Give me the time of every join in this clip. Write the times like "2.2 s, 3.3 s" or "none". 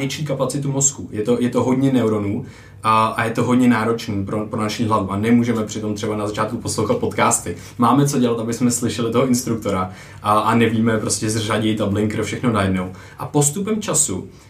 none